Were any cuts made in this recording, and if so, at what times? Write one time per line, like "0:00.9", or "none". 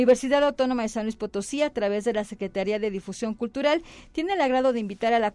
none